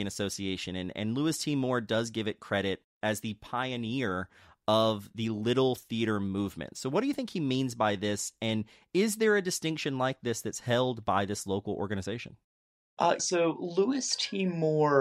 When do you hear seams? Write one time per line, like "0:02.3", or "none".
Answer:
0:13.2